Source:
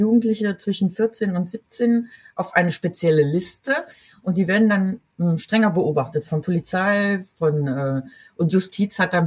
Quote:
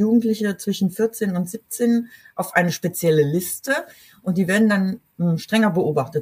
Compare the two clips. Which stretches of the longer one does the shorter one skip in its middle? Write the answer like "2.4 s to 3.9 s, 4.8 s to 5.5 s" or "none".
none

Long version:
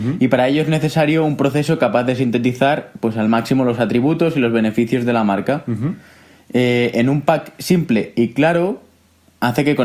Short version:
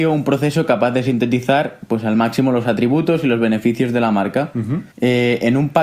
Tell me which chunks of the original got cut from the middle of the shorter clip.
6.0 s to 6.4 s

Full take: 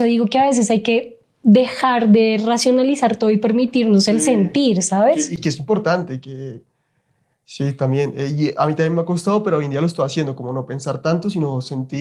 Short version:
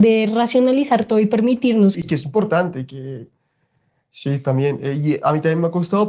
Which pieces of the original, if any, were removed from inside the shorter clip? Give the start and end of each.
4.1 s to 5.3 s

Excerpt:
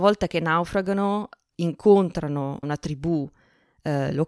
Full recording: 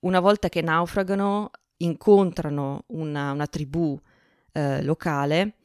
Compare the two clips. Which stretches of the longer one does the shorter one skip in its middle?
2.8 s to 3.3 s

